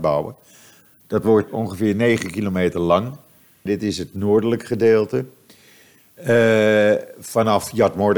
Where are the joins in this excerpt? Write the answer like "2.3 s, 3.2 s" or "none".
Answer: 1.5 s, 3.7 s